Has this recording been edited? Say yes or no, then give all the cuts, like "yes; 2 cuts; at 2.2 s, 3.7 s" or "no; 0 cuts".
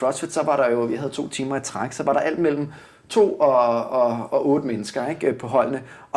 no; 0 cuts